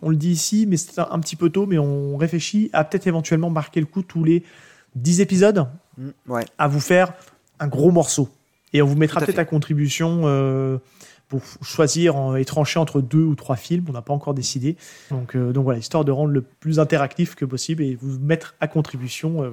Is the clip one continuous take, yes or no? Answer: no